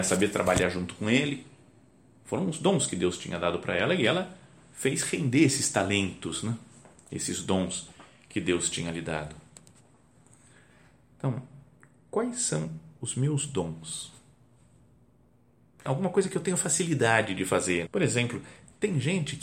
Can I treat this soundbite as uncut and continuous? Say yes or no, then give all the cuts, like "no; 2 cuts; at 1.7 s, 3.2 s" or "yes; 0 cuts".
no; 2 cuts; at 15.9 s, 17.9 s